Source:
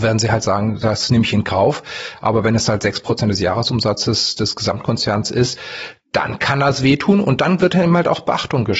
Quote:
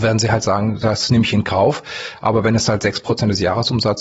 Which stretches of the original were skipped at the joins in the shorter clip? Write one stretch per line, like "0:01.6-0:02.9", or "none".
none